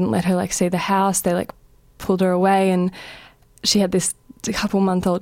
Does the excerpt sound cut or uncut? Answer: uncut